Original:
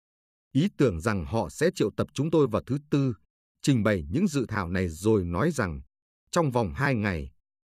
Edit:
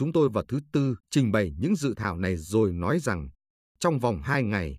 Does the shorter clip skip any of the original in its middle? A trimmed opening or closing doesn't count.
yes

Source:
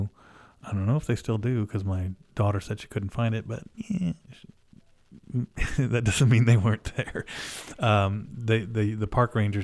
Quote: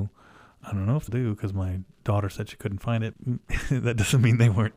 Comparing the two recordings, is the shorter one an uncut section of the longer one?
no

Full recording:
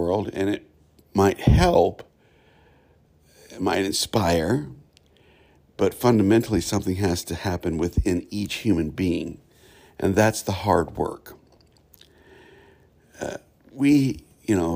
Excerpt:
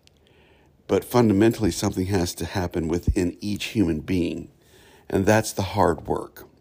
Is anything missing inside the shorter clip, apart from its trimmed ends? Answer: no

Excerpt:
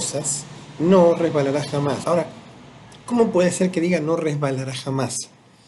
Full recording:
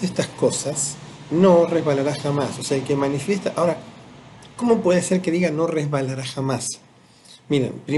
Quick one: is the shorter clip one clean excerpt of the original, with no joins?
no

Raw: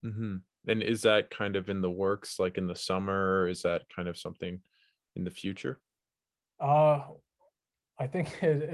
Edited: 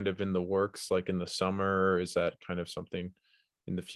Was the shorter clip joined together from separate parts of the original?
no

